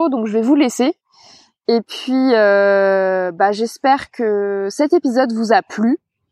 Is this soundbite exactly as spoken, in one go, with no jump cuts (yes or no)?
yes